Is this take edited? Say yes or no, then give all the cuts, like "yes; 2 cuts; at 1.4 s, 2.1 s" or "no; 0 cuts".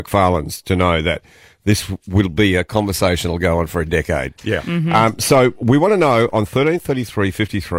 no; 0 cuts